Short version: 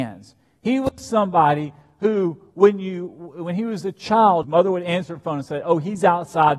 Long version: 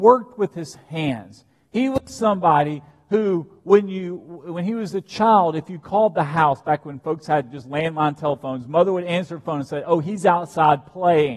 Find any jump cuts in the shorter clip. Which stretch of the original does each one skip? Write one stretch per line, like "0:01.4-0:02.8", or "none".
0:05.5-0:08.6